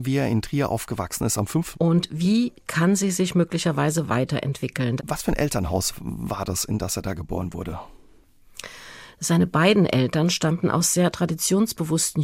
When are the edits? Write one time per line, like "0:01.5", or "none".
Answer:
0:01.7
0:05.0